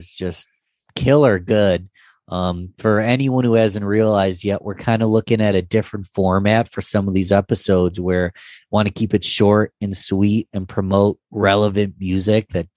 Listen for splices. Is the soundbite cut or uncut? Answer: uncut